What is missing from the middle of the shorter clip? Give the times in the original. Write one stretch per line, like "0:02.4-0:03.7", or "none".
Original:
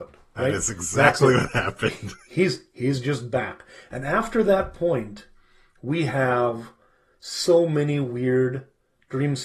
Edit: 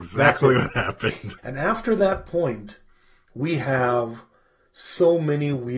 0:02.2-0:03.9